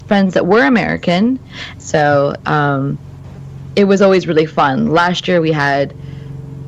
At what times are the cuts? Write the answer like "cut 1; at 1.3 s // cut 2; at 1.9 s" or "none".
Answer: cut 1; at 1.8 s